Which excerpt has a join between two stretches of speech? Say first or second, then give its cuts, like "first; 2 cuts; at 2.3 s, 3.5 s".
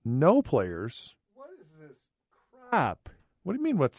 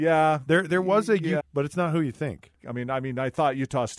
second; 2 cuts; at 1.4 s, 2.6 s